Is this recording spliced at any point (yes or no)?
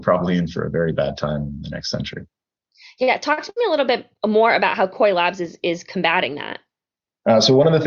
no